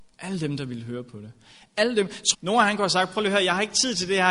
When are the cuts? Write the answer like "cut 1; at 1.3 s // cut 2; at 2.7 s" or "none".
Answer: cut 1; at 2.3 s